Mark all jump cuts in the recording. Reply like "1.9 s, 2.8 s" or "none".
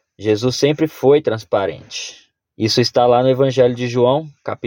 2.5 s